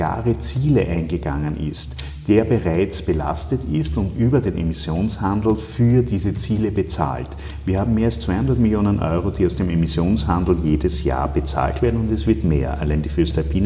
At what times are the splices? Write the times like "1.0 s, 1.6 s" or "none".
none